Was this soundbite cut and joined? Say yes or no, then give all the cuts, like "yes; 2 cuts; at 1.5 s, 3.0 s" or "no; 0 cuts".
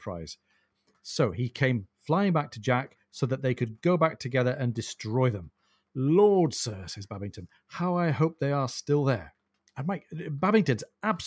yes; 1 cut; at 9.6 s